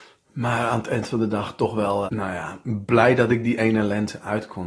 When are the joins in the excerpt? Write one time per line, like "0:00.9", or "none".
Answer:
0:02.1